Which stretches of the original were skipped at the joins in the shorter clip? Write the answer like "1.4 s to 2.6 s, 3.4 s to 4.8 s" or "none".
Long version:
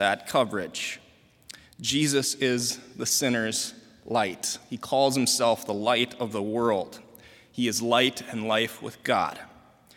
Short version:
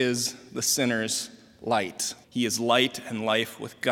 4.7 s to 7.5 s